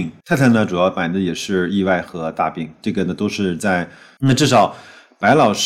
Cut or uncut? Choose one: cut